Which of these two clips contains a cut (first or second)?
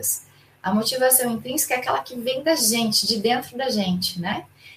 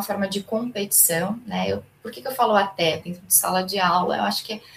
second